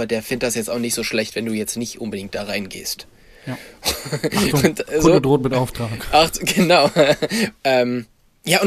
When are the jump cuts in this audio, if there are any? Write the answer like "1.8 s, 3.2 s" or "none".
7.5 s